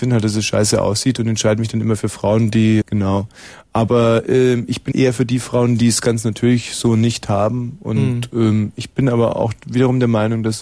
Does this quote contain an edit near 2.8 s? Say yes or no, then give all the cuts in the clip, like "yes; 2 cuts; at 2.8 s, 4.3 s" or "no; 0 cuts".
yes; 2 cuts; at 2.8 s, 4.9 s